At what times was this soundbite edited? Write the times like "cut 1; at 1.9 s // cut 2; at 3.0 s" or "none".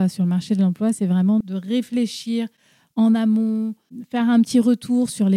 cut 1; at 1.4 s